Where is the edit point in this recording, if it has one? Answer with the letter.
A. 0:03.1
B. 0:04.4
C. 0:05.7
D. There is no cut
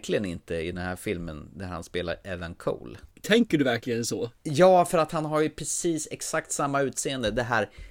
A